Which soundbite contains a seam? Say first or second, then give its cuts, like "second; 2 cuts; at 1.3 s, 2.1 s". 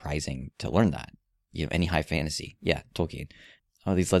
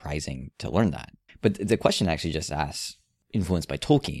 second; 1 cut; at 1.3 s